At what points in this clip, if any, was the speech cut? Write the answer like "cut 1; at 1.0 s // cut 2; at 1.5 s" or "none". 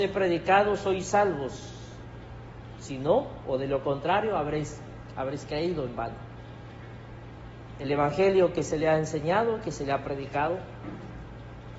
none